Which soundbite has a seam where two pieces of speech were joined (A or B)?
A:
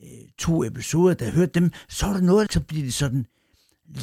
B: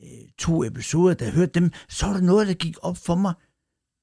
A